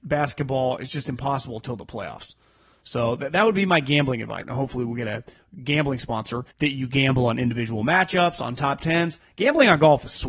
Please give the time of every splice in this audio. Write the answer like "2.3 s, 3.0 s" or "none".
4.4 s, 6.5 s